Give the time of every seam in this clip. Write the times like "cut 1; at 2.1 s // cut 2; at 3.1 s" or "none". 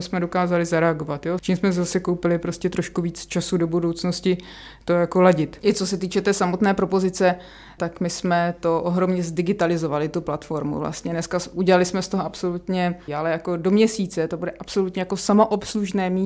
cut 1; at 1.4 s // cut 2; at 13.1 s